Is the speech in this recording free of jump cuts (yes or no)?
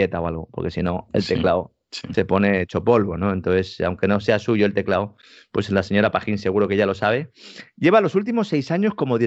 yes